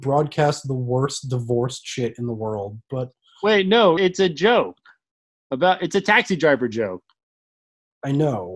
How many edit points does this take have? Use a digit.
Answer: 1